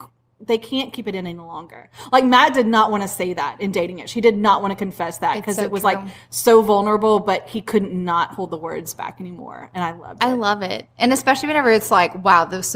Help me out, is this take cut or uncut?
uncut